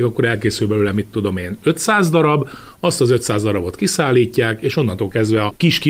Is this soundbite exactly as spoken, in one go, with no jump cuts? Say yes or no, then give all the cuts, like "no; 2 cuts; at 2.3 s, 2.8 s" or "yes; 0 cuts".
yes; 0 cuts